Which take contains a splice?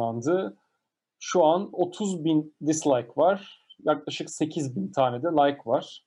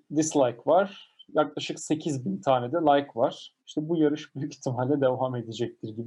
second; 1 cut; at 3.6 s

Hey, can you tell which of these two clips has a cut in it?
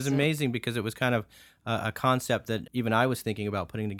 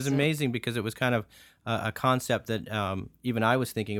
first; 1 cut; at 2.7 s

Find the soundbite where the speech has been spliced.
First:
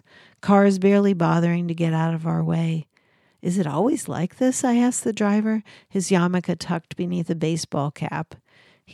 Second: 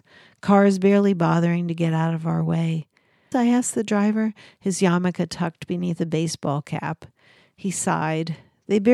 second; 1 cut; at 3.3 s

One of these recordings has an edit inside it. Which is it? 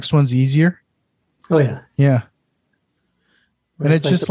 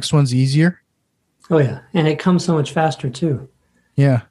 first; 1 cut; at 1.8 s

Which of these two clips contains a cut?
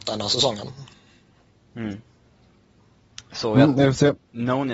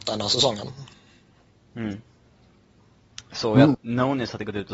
second; 1 cut; at 3.7 s

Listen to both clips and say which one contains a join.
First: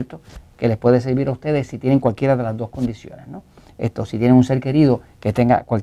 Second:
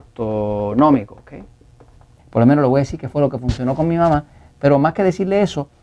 second; 1 cut; at 2.2 s

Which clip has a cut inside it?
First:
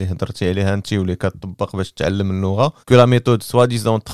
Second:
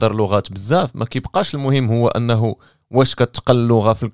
first; 1 cut; at 2.8 s

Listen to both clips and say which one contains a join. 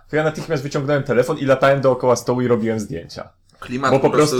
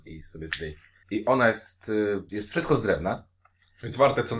second; 2 cuts; at 1.0 s, 2.3 s

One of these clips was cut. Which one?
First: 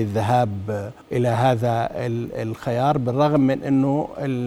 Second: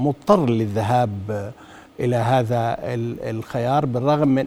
first; 1 cut; at 1.0 s

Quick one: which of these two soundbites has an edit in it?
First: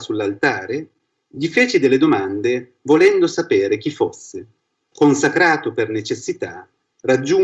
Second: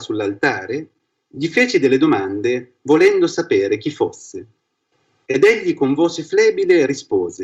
first; 1 cut; at 4.9 s

